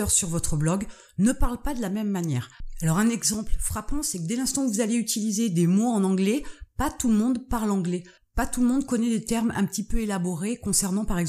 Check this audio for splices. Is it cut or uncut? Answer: uncut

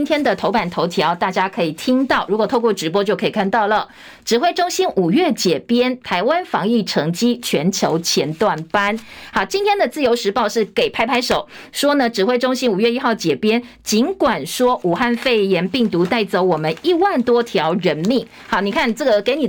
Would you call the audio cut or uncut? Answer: uncut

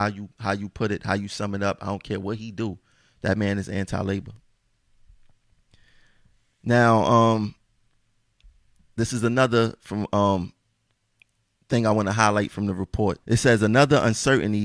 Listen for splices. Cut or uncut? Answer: cut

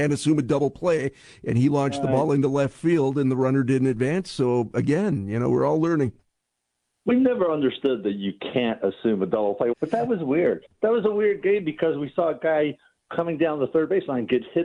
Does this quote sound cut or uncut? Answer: cut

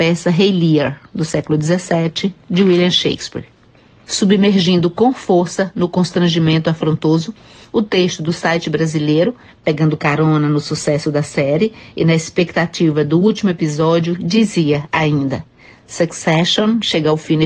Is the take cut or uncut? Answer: uncut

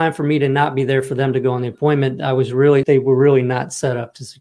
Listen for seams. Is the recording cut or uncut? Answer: cut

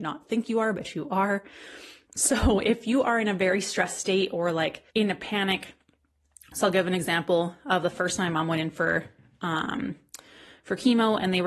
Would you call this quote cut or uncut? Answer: cut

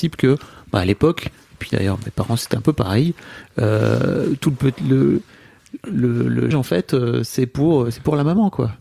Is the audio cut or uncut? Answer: cut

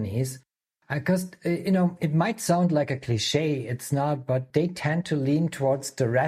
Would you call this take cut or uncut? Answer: cut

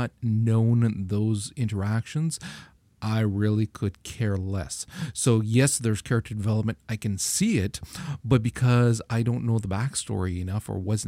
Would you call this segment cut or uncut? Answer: uncut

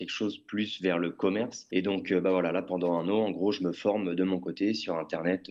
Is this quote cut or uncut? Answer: uncut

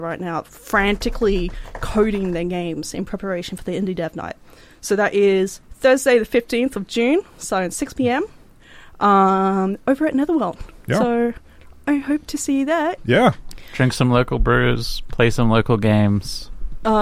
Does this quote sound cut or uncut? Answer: cut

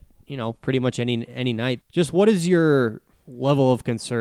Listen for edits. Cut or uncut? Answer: cut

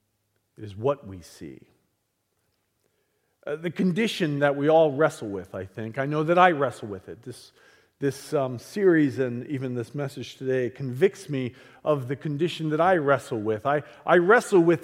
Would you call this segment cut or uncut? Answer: uncut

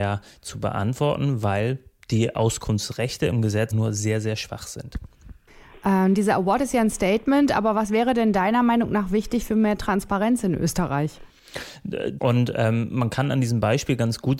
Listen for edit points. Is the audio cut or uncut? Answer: cut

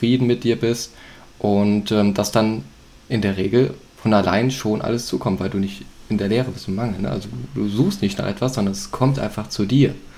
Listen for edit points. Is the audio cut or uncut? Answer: uncut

